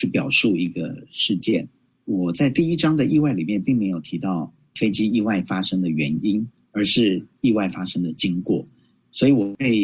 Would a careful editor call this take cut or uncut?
uncut